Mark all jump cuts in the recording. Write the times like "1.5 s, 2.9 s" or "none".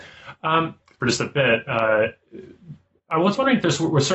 1.0 s